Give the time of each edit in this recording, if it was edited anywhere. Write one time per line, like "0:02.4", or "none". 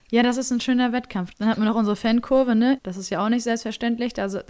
0:01.3
0:02.8